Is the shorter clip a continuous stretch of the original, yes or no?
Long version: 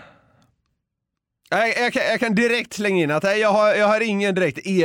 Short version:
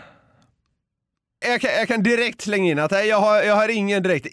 no